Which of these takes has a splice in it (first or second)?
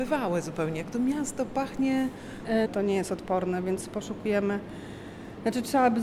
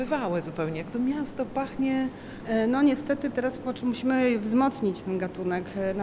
first